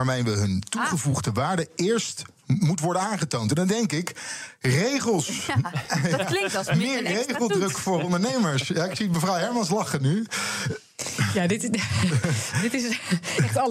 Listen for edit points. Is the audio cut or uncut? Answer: uncut